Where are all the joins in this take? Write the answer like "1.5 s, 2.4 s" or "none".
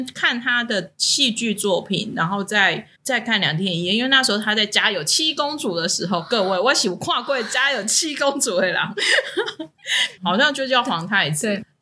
2.9 s, 10.2 s